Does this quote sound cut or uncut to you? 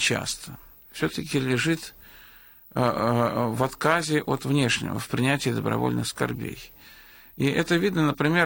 uncut